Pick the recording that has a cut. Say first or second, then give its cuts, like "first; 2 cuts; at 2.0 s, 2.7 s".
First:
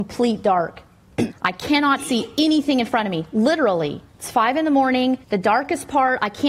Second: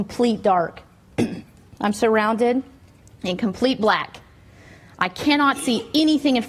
first; 3 cuts; at 1.3 s, 4.1 s, 5.2 s